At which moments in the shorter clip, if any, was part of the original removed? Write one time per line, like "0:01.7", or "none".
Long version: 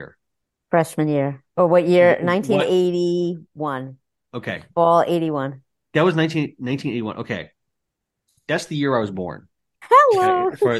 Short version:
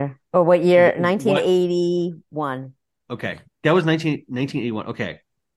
0:03.5